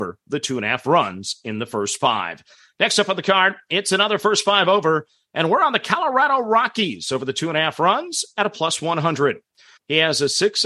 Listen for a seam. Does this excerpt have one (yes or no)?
yes